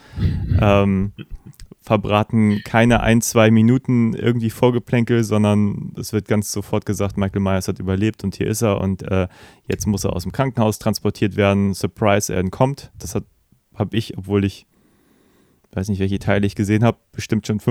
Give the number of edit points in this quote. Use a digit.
0